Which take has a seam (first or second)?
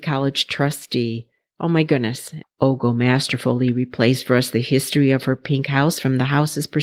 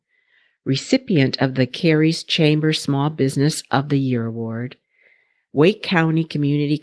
first